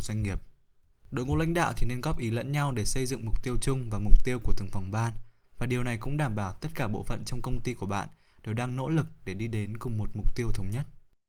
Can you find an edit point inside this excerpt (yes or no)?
yes